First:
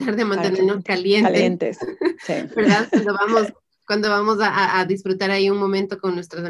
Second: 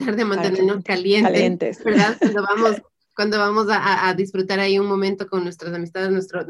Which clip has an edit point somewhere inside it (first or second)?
second